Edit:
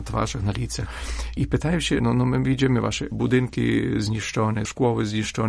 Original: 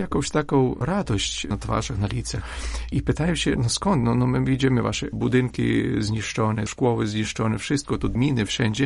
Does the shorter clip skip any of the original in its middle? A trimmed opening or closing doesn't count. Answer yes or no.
yes